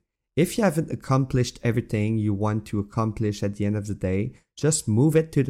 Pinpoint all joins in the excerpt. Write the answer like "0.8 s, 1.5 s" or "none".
none